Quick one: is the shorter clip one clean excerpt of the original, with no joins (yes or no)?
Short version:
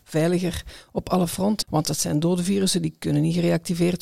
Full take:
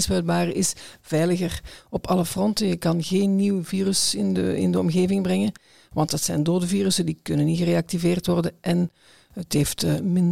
no